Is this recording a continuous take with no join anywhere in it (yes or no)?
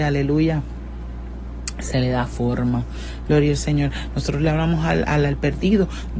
no